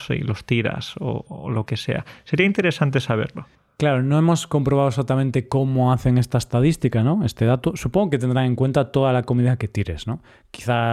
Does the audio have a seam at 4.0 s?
no; 1 cut; at 1.3 s

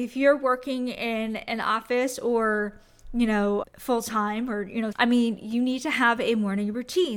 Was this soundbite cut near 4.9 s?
yes; 1 cut; at 4.9 s

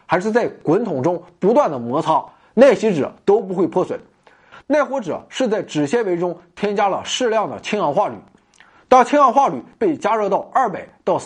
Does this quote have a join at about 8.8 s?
no; 1 cut; at 4.6 s

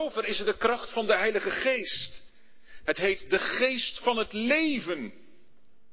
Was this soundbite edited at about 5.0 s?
no; 1 cut; at 2.9 s

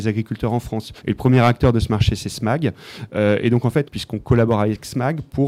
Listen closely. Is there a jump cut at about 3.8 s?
yes; 2 cuts; at 1.0 s, 3.8 s

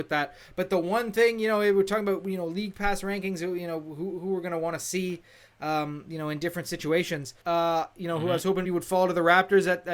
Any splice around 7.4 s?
yes; 2 cuts; at 7.4 s, 8.6 s

